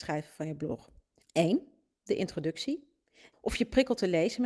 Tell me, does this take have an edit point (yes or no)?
yes